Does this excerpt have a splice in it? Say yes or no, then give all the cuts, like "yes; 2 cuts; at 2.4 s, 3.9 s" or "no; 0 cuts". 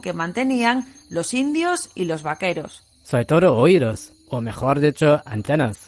no; 0 cuts